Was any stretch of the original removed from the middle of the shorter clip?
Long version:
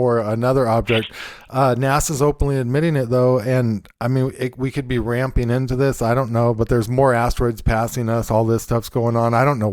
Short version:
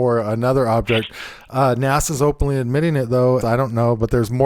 yes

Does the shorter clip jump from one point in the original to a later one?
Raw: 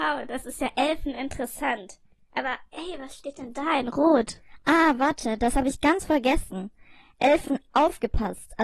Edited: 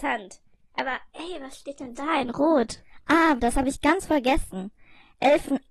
yes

